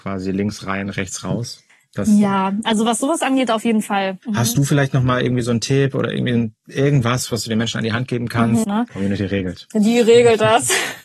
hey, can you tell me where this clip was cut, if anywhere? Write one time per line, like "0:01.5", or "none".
0:04.2
0:08.6